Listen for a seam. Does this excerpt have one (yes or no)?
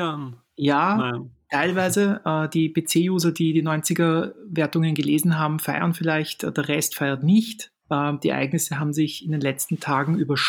no